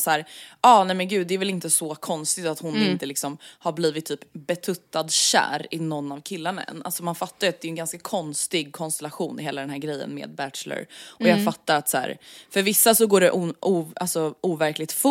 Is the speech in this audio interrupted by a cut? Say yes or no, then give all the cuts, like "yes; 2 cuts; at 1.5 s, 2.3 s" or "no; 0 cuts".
no; 0 cuts